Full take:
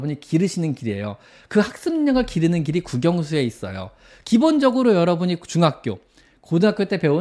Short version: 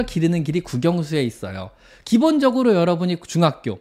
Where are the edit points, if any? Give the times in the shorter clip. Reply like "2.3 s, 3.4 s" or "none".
none